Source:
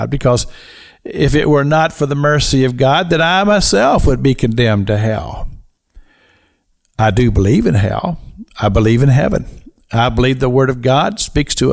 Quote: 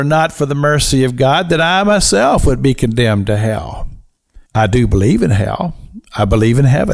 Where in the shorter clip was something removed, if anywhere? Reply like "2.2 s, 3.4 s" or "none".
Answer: 4.4 s

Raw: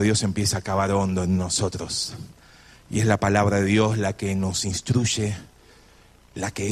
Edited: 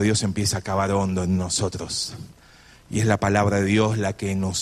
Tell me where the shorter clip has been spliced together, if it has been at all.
none

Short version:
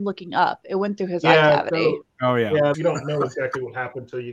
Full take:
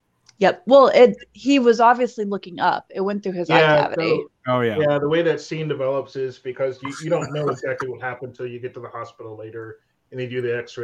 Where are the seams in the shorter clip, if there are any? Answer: 2.7 s

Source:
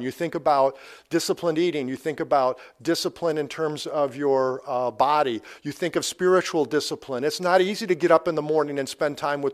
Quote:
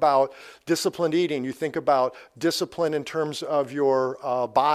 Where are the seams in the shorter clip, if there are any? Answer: none

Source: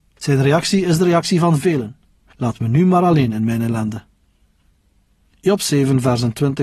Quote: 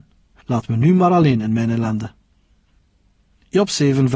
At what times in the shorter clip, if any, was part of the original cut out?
none

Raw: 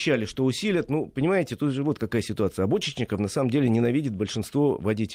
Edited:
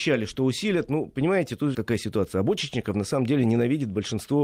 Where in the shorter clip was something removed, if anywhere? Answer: 1.7 s

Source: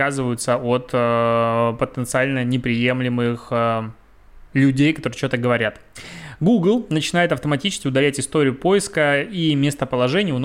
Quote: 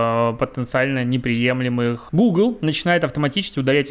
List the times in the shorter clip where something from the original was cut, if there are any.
2.1 s

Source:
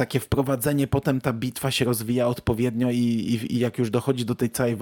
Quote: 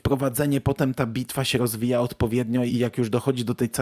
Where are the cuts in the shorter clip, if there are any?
2.7 s

